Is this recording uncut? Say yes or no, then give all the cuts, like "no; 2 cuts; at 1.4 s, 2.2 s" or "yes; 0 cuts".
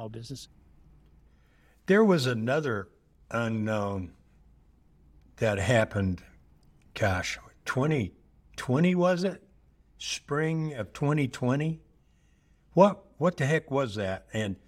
yes; 0 cuts